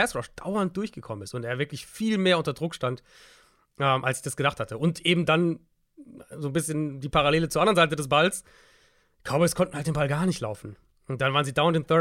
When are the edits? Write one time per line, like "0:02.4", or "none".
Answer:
none